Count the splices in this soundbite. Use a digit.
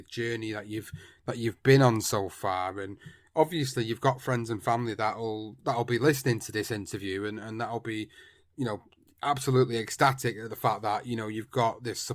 0